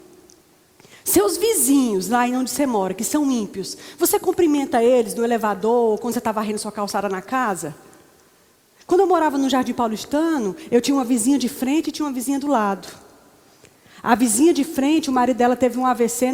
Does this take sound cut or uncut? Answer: uncut